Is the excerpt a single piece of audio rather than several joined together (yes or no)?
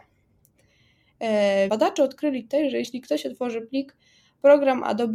no